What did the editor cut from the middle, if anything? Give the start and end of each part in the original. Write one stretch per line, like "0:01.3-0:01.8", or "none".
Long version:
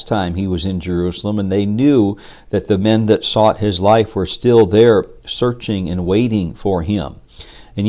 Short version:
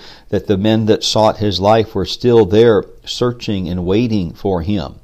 none